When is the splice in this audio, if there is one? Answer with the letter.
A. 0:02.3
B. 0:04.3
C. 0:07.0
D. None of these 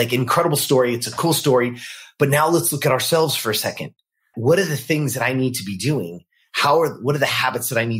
B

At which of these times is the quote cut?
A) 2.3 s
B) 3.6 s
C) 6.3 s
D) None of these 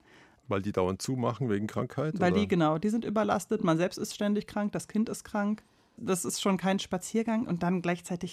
D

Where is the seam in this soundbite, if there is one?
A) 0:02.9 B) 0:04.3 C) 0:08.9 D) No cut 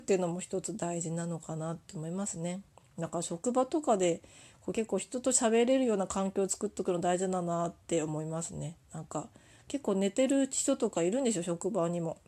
D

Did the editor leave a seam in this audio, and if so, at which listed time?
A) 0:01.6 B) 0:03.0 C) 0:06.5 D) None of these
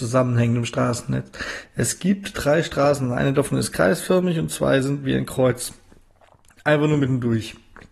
D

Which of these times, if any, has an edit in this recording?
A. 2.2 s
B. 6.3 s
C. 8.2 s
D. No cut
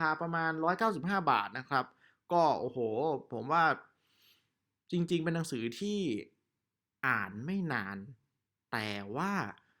D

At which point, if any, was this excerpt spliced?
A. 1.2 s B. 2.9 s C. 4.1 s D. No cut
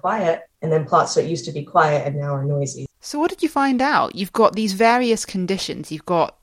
B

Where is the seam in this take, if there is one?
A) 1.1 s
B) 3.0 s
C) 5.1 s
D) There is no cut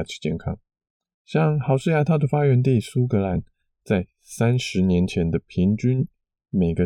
A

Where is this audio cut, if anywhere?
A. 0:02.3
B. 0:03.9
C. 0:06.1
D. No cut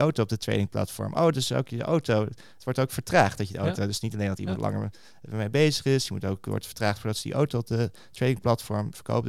D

